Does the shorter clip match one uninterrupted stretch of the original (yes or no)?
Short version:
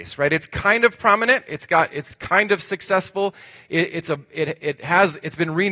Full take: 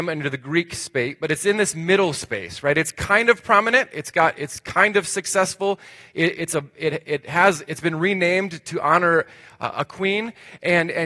yes